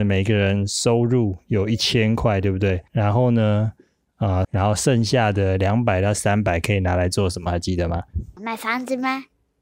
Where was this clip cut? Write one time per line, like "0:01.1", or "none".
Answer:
0:02.9
0:04.4